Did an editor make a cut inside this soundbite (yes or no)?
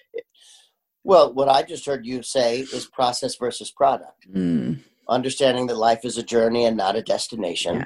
no